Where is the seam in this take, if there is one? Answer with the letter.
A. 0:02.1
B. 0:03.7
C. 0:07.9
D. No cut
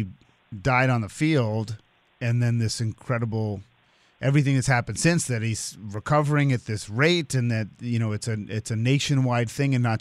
A